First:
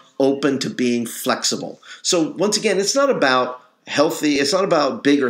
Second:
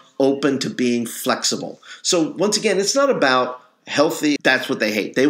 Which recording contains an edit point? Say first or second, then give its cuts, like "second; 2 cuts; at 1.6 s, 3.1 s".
second; 1 cut; at 4.4 s